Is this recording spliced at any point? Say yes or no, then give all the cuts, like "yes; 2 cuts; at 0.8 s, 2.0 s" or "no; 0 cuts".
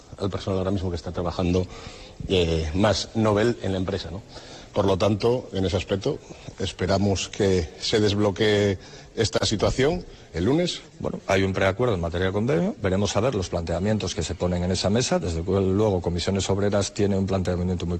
no; 0 cuts